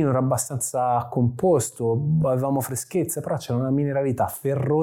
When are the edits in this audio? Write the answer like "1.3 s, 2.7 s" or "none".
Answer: none